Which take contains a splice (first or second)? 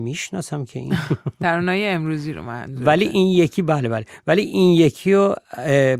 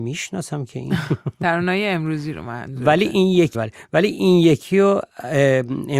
second